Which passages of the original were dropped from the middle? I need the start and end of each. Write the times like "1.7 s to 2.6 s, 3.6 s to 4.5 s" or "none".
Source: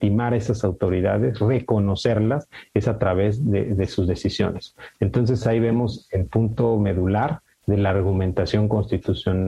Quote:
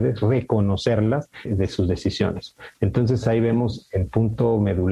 2.6 s to 3.6 s